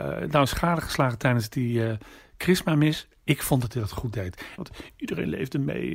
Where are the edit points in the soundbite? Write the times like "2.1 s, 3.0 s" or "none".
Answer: 4.6 s